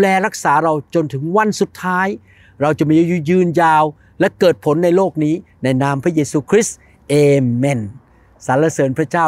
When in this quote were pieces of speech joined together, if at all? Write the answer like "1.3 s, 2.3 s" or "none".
none

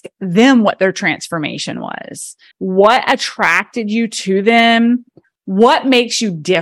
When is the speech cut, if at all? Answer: 2.5 s, 5.2 s

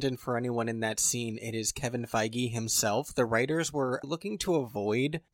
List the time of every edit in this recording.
4.0 s

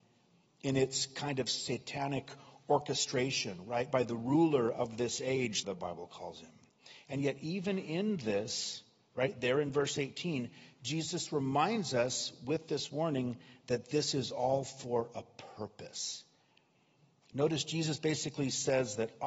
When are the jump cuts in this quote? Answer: 5.6 s

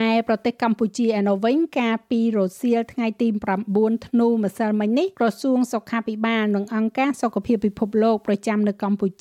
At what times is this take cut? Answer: 5.1 s

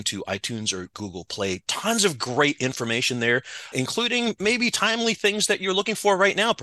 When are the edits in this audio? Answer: 3.7 s

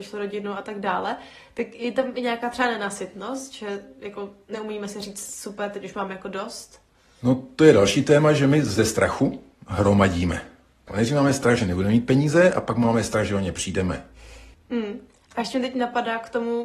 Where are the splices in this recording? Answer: 10.9 s, 14.5 s

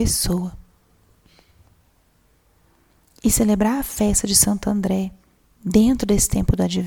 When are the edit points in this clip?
none

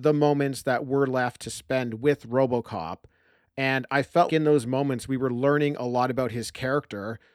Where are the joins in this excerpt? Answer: 4.3 s

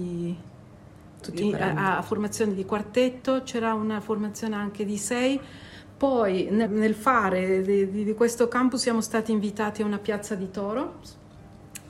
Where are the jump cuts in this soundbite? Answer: 6.7 s

